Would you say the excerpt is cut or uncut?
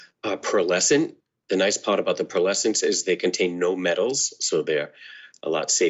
uncut